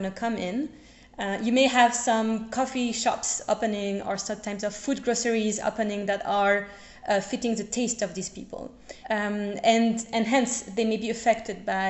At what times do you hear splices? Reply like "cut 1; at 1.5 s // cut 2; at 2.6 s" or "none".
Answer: cut 1; at 9.0 s